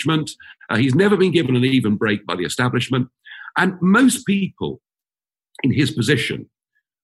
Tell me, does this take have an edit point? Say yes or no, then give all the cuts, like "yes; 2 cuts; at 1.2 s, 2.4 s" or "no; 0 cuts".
no; 0 cuts